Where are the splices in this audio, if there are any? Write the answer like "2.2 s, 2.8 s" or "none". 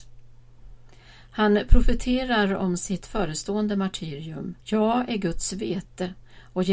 4.6 s